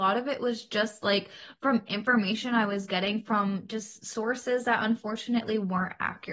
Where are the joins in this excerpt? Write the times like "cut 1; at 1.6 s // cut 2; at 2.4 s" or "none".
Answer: none